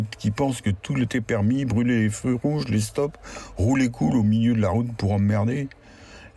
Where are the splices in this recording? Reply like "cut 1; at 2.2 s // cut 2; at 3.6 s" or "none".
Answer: none